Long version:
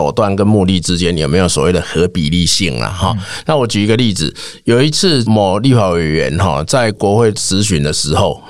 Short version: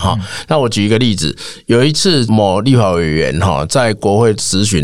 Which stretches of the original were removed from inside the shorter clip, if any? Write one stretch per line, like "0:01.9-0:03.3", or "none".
none